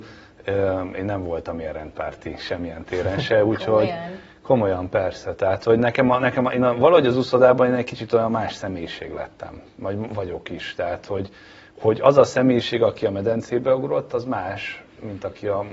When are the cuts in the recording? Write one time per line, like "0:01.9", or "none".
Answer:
none